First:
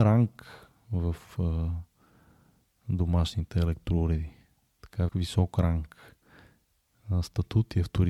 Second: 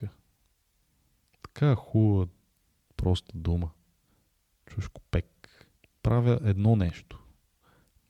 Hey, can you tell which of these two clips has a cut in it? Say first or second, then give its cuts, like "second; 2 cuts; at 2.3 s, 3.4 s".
first; 1 cut; at 5.1 s